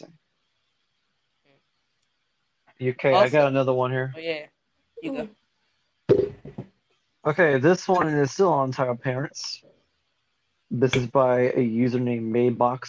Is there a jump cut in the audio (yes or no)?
no